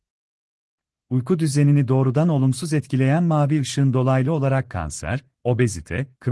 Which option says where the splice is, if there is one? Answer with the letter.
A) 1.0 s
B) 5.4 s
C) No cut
B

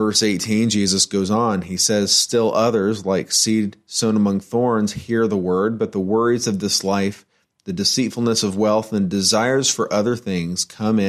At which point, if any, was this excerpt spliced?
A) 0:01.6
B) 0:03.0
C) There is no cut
C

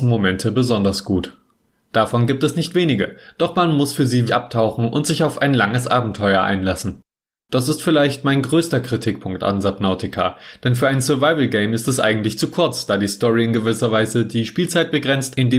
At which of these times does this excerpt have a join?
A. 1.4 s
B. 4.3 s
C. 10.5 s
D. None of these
B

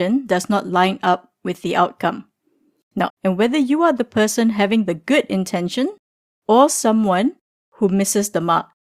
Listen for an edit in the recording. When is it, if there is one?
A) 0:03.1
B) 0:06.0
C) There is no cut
A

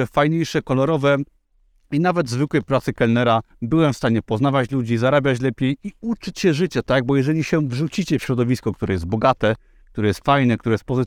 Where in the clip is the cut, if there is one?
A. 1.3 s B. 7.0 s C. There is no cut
C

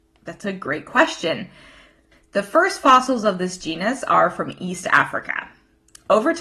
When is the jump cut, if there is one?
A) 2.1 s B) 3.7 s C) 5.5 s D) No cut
A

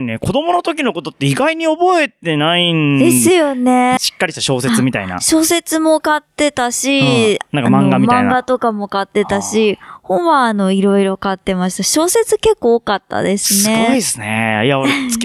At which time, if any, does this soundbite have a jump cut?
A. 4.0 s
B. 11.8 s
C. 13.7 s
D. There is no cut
A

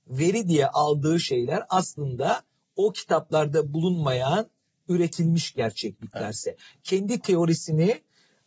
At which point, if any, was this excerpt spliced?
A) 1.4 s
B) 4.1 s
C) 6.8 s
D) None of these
D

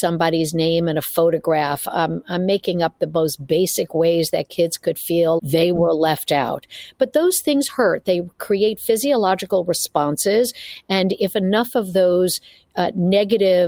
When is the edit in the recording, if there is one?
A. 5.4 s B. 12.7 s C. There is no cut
A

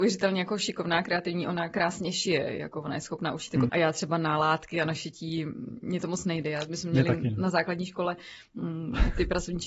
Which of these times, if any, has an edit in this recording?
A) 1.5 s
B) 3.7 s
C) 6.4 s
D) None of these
B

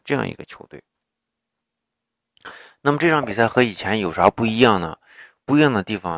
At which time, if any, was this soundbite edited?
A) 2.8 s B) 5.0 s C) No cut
C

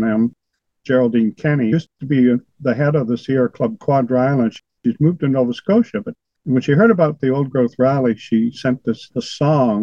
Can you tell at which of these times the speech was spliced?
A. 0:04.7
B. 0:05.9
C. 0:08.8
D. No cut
D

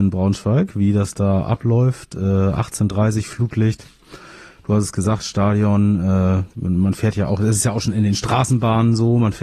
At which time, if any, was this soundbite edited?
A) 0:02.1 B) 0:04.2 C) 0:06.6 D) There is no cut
D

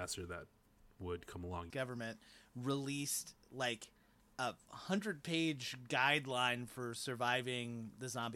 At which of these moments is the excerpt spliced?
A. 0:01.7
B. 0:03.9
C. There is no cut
A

